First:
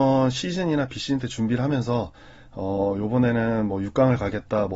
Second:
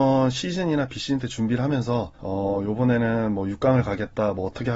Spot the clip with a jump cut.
second; 1 cut; at 2.1 s

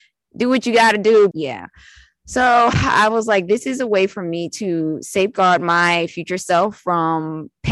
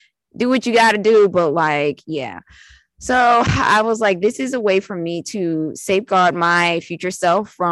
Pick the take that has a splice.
first; 1 cut; at 1.3 s

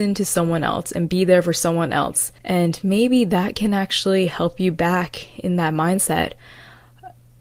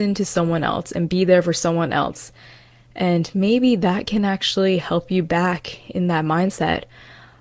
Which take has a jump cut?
first; 1 cut; at 2.4 s

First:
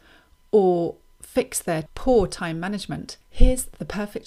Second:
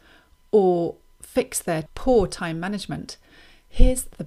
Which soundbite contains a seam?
first; 1 cut; at 3.2 s

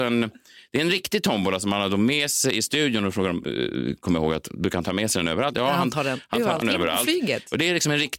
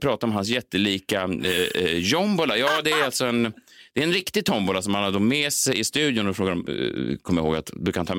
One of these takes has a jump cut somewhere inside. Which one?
first; 1 cut; at 6.6 s

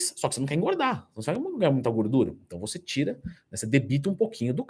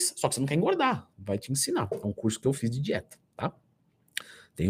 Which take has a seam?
second; 1 cut; at 1.1 s

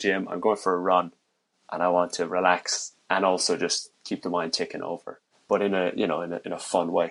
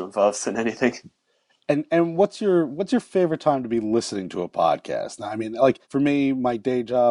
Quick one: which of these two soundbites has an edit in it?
second; 1 cut; at 5.8 s

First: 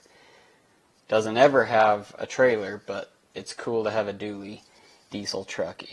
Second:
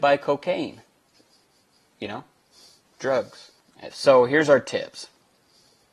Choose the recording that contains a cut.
second; 1 cut; at 3.9 s

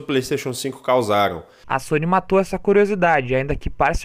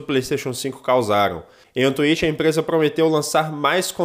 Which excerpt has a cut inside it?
first; 1 cut; at 1.6 s

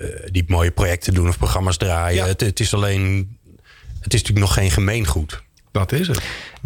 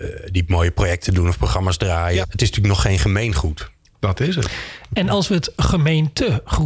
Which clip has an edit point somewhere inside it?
second; 1 cut; at 2.2 s

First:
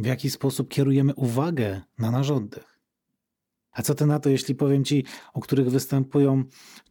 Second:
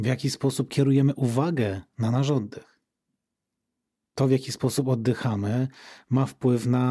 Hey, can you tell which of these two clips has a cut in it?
first; 2 cuts; at 3.7 s, 5.2 s

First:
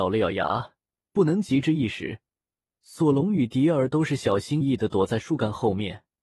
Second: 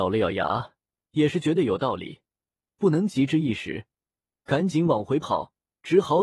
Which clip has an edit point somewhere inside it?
first; 3 cuts; at 1.1 s, 2.7 s, 4.6 s

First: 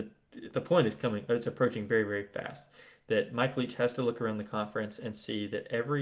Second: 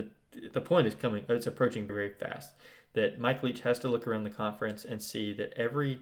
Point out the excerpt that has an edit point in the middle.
second; 1 cut; at 1.9 s

